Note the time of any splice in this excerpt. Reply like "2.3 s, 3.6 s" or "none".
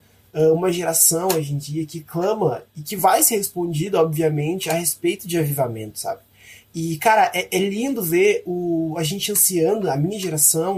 none